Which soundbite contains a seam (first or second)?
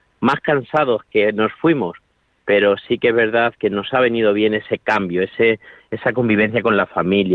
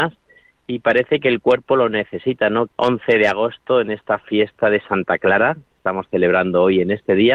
second